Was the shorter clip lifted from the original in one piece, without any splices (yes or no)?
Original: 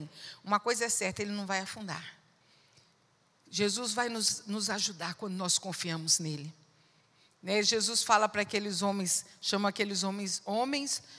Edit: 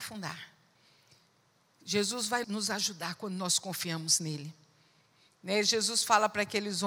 no